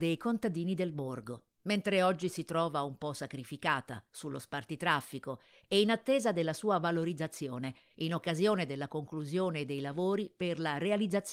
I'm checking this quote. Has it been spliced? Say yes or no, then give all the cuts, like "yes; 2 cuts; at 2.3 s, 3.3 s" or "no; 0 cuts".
no; 0 cuts